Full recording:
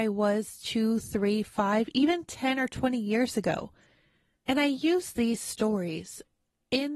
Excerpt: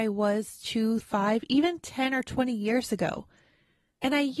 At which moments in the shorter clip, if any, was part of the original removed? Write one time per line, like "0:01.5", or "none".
0:01.0